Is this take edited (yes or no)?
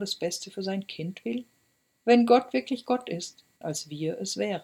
yes